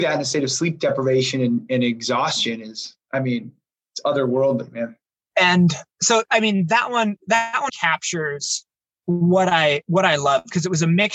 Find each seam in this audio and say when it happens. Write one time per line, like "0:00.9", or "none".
0:05.9
0:07.7